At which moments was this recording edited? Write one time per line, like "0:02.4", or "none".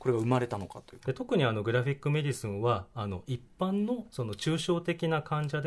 0:01.0